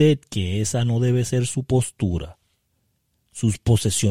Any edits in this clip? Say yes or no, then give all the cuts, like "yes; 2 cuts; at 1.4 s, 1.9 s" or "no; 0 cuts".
yes; 1 cut; at 3.1 s